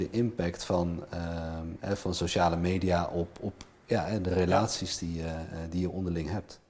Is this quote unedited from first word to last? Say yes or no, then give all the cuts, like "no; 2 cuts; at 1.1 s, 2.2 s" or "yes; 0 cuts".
yes; 0 cuts